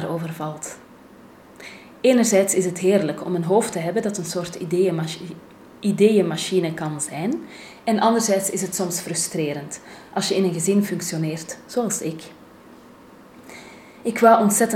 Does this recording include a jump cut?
no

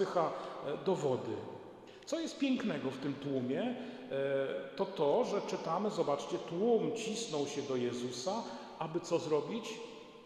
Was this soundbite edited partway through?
no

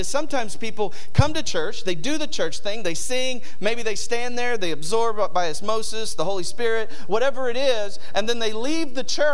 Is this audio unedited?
yes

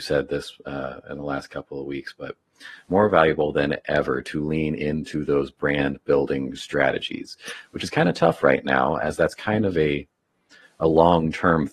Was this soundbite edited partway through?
no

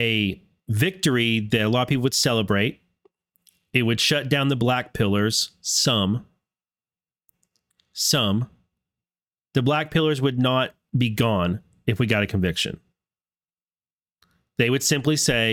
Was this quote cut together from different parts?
no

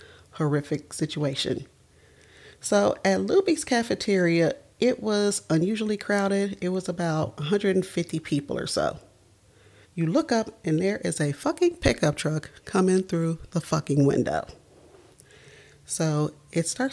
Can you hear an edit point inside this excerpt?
yes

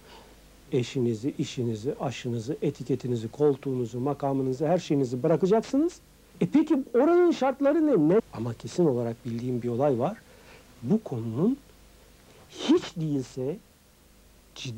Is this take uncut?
no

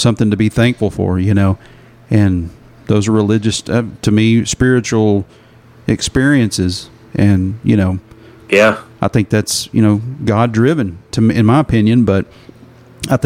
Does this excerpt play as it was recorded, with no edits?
yes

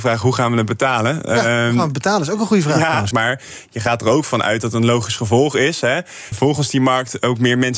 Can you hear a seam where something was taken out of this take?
yes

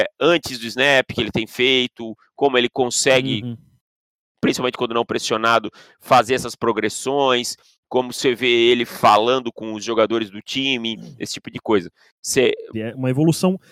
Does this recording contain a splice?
yes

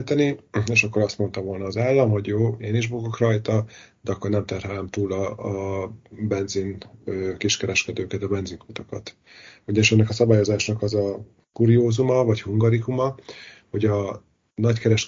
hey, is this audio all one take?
yes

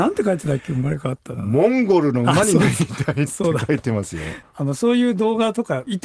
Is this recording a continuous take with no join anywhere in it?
no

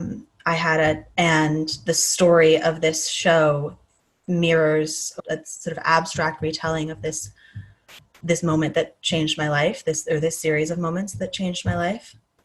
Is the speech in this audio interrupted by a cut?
yes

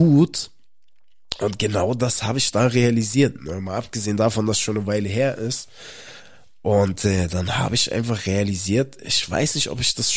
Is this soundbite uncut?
no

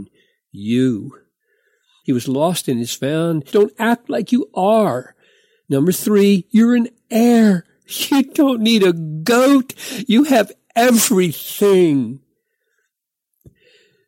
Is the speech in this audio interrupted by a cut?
yes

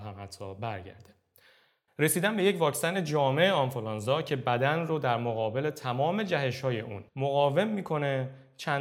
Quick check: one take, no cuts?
no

